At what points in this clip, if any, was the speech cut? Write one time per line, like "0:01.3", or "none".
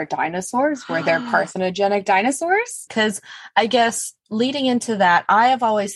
0:02.9